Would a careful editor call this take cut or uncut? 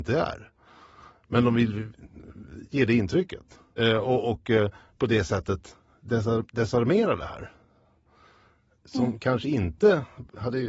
cut